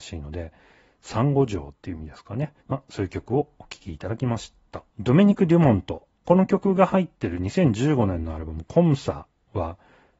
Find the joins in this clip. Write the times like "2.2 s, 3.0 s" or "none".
2.6 s, 4.9 s